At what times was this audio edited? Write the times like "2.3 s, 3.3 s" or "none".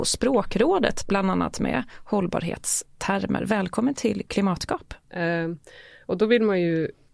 5.0 s